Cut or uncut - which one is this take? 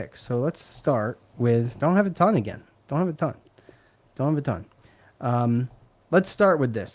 uncut